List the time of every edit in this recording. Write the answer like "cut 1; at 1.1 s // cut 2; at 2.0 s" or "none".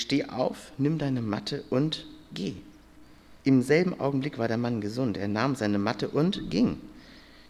cut 1; at 3.4 s